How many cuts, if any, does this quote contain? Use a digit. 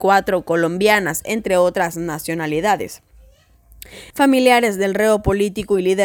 1